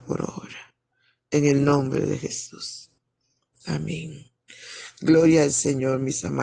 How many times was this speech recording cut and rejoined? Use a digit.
0